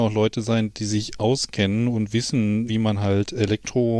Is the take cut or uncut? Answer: cut